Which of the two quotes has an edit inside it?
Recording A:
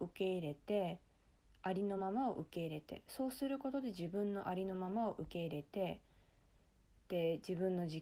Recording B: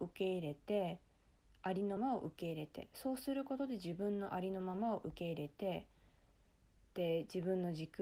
B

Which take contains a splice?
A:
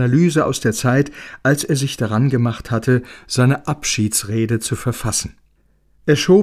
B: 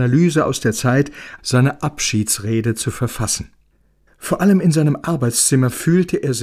B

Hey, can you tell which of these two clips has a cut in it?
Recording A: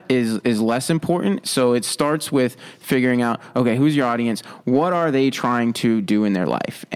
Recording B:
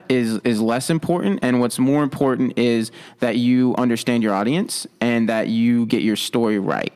A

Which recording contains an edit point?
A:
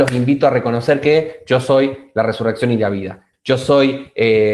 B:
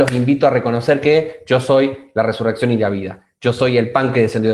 A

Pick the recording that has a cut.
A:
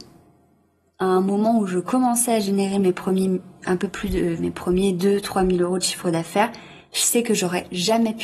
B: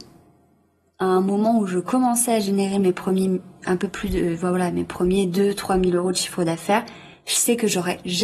A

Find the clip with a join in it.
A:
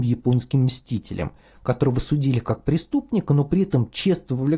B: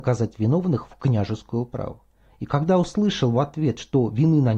B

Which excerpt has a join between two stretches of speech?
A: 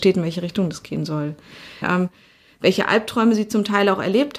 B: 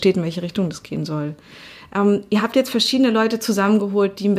A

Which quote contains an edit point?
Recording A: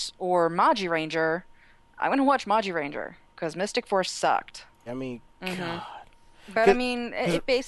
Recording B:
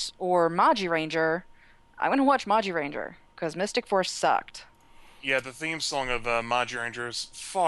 A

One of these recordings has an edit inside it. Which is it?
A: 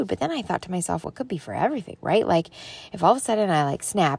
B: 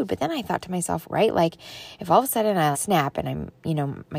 B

